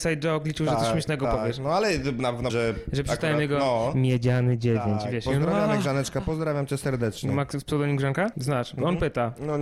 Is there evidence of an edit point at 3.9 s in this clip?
no; 2 cuts; at 2.5 s, 8.3 s

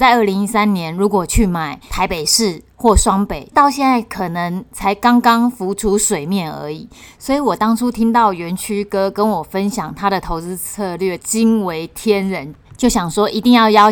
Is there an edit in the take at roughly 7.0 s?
no; 0 cuts

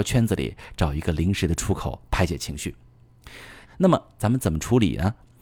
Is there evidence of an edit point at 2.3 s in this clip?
no; 1 cut; at 3.6 s

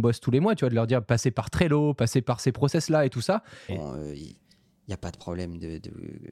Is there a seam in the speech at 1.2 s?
no; 1 cut; at 3.7 s

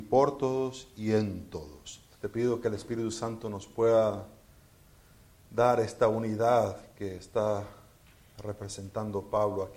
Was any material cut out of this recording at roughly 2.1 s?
yes; 1 cut; at 2.1 s

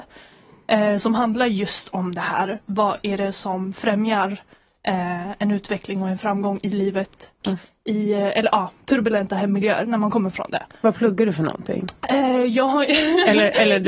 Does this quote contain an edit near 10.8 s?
no; 1 cut; at 7.4 s

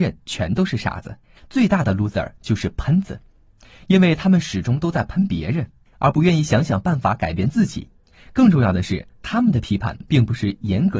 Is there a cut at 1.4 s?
yes; 1 cut; at 1.4 s

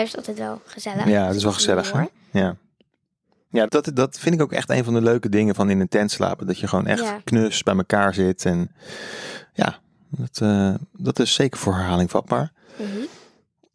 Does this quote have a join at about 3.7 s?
yes; 1 cut; at 3.7 s

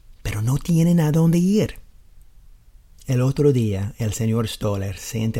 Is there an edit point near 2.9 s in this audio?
yes; 1 cut; at 2.9 s

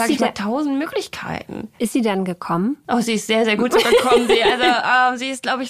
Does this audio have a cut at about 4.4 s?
no; 0 cuts

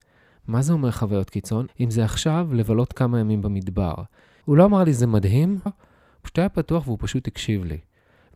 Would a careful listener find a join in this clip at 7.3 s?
no; 3 cuts; at 1.7 s, 4.4 s, 5.7 s

